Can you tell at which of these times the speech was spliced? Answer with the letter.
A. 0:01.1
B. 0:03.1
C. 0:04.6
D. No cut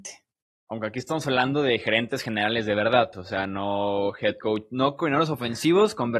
B